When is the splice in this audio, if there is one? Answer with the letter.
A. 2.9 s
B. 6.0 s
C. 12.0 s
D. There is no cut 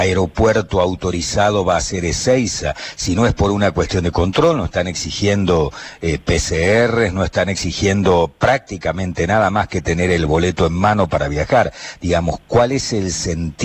D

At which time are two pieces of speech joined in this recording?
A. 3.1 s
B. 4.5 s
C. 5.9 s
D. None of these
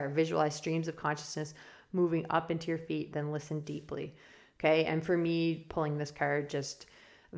A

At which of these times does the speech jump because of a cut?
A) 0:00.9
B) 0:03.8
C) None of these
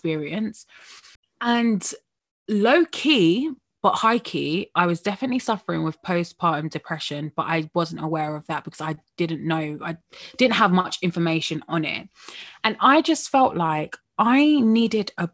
C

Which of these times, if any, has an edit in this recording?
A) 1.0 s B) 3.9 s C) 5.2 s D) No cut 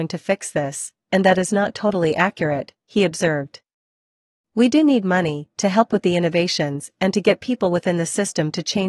D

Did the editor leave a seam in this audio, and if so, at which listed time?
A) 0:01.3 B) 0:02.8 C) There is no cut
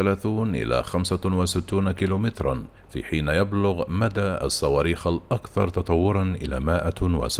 B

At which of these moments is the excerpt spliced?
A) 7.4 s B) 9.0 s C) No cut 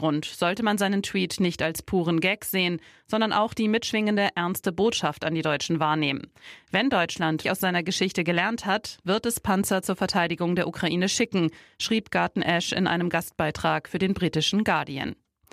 A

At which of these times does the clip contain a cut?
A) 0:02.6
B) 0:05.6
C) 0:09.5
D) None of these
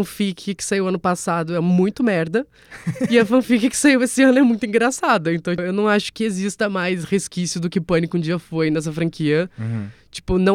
B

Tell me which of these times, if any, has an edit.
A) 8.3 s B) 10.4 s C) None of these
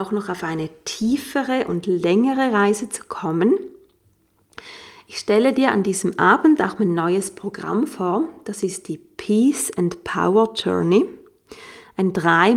C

